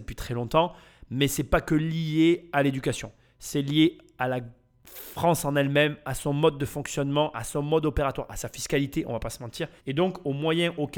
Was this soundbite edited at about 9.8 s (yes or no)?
yes